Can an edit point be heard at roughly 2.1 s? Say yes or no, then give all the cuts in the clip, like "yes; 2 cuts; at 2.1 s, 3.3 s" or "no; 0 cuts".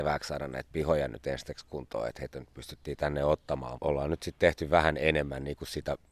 no; 1 cut; at 3.8 s